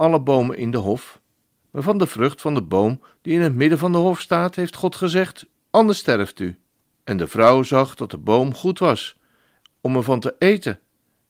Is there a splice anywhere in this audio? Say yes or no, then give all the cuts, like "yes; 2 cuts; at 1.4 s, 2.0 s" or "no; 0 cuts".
yes; 3 cuts; at 1.6 s, 5.5 s, 6.9 s